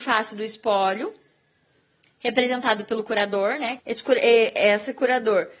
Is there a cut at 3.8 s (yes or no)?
yes